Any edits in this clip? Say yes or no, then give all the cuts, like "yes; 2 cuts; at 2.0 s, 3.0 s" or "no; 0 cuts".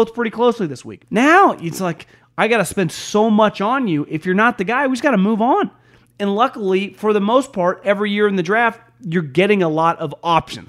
yes; 1 cut; at 1.0 s